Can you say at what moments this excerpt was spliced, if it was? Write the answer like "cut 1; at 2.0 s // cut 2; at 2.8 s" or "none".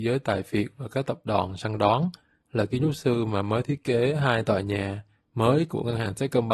cut 1; at 2.4 s

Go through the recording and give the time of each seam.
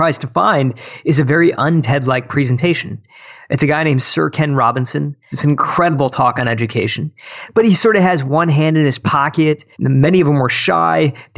cut 1; at 5.3 s // cut 2; at 9.7 s

